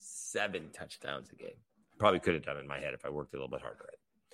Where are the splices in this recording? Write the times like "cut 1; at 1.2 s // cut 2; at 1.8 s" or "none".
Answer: none